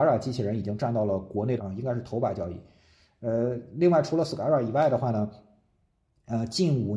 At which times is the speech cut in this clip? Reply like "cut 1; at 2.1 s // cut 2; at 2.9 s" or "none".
none